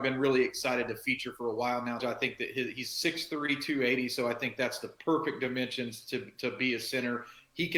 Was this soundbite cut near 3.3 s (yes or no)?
no